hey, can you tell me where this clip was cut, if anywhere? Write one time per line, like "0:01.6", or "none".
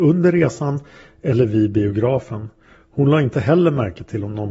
none

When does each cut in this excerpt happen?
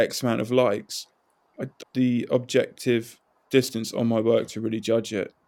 0:01.8

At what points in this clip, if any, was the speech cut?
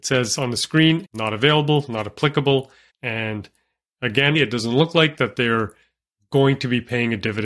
0:01.0
0:02.9
0:04.3

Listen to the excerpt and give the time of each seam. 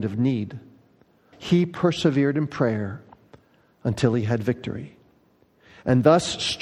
0:01.3

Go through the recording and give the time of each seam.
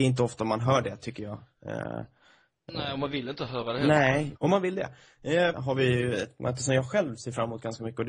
0:04.4
0:05.5

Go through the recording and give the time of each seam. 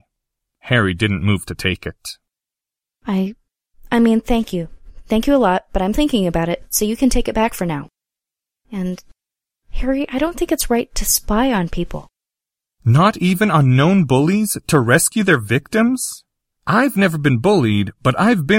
0:05.9

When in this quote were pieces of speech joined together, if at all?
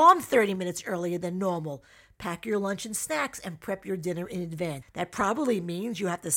0:04.8

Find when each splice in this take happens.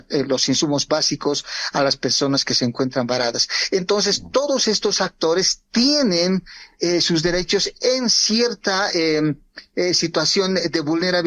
none

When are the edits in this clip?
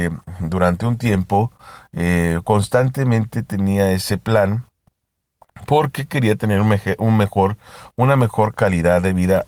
none

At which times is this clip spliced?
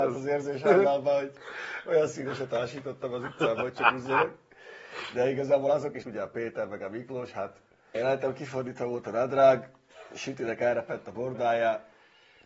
0:06.0
0:08.0

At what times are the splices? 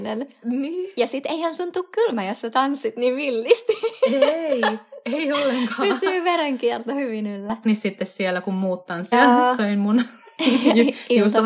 0:07.6
0:09.1

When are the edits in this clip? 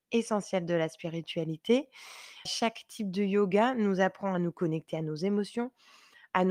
0:02.5

